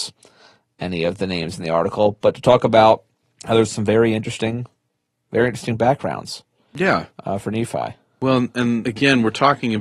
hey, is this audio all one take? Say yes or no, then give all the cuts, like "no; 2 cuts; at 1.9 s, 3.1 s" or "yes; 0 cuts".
yes; 0 cuts